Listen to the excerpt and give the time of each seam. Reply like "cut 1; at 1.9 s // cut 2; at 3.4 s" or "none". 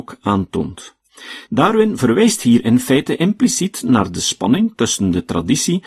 cut 1; at 1.5 s